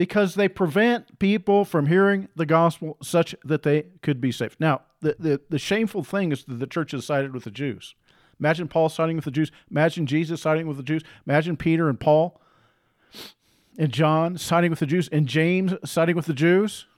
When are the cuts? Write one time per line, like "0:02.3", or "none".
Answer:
0:05.1